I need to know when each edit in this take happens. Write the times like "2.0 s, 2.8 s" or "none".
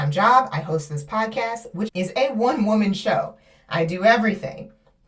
1.9 s